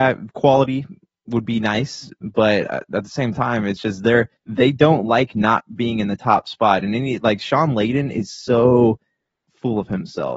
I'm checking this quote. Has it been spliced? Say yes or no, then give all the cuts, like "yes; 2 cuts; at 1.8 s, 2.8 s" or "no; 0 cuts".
yes; 1 cut; at 4.4 s